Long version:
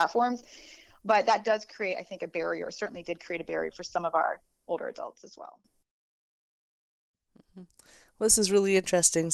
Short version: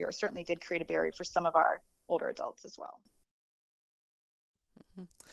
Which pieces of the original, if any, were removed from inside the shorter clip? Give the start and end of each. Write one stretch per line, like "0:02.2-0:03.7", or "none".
none